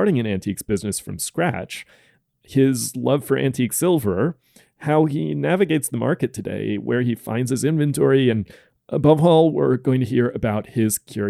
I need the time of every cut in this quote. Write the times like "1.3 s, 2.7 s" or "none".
none

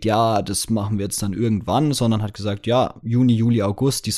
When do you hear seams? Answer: none

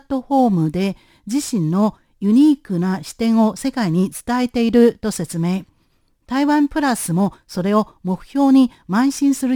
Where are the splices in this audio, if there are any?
none

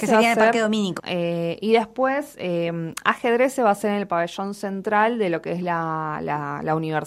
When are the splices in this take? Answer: 1.0 s

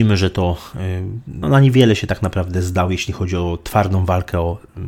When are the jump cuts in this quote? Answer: 1.4 s

